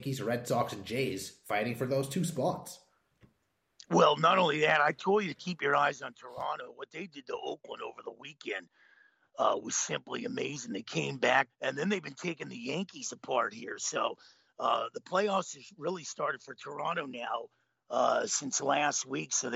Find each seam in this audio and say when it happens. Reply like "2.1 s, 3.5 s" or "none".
11.5 s